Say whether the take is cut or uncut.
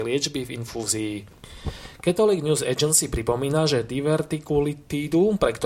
uncut